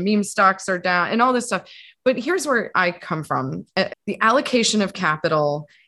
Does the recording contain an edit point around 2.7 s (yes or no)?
yes